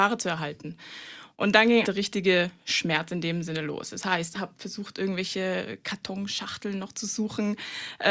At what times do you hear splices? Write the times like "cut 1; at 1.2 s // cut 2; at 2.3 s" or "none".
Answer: cut 1; at 1.8 s // cut 2; at 4.3 s